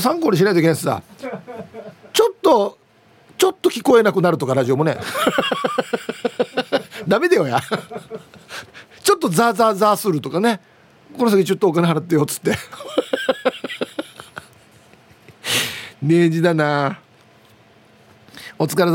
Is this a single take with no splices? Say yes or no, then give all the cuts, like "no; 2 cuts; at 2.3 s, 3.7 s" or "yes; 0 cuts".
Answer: yes; 0 cuts